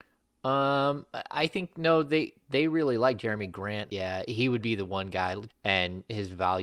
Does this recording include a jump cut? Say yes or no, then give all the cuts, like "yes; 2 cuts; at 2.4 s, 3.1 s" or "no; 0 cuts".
yes; 2 cuts; at 3.9 s, 5.5 s